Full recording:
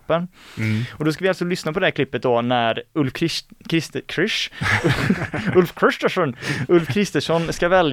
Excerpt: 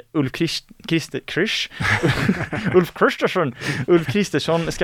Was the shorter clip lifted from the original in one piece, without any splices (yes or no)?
yes